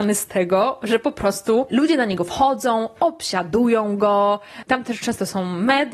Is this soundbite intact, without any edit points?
no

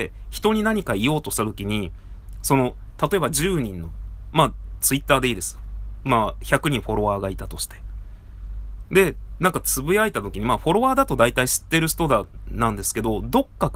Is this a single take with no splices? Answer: yes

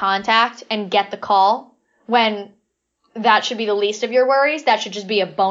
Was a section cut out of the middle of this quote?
no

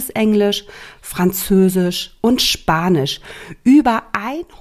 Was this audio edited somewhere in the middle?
no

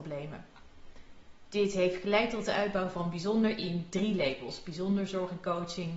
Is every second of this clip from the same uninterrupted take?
yes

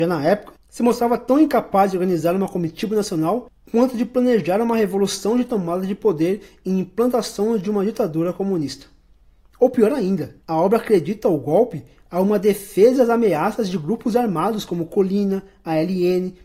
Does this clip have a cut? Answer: yes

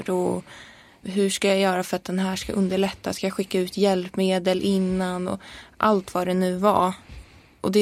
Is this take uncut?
no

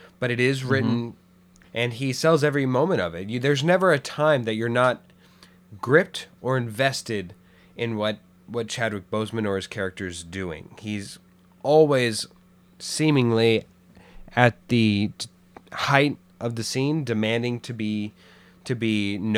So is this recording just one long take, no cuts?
no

